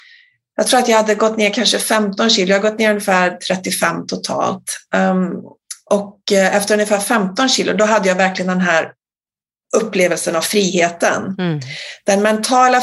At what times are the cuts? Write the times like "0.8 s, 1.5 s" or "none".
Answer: none